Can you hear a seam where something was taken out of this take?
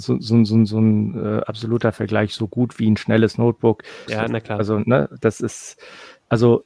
yes; 1 cut; at 4.1 s

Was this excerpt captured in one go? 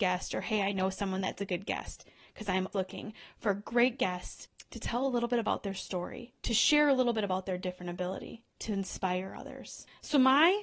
no; 2 cuts; at 2.7 s, 6.4 s

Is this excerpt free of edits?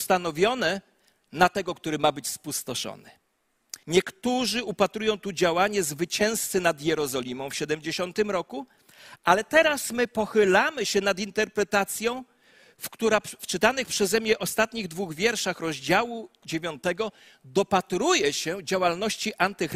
no; 1 cut; at 3.8 s

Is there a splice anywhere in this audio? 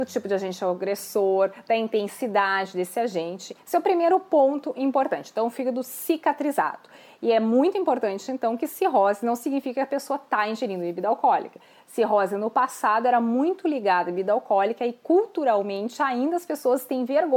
no; 0 cuts

